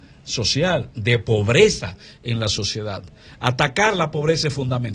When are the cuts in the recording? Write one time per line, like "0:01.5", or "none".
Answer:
0:00.9